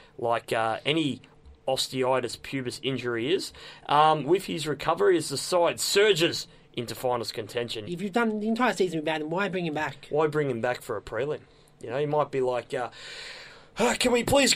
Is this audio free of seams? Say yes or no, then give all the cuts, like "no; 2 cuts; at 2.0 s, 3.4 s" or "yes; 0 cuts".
no; 1 cut; at 7.9 s